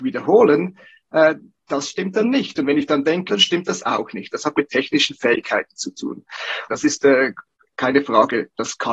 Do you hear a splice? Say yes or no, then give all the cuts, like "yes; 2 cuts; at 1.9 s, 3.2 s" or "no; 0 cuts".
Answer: yes; 2 cuts; at 3.3 s, 6.7 s